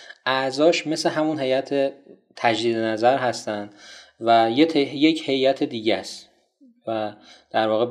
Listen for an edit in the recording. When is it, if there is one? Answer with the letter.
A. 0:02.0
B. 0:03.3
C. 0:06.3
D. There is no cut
D